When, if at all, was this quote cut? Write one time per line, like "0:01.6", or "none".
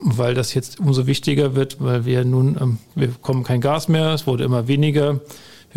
0:02.9